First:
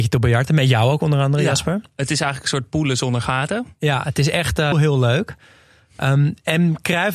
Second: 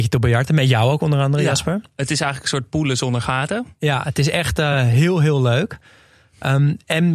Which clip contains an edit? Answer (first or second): first